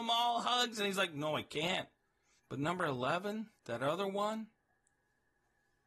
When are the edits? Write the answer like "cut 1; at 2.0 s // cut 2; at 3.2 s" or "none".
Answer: cut 1; at 2.4 s // cut 2; at 3.6 s